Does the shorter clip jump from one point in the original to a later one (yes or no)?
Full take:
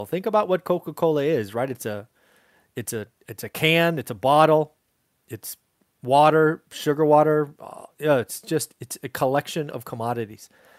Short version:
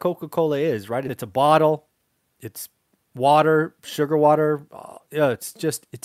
yes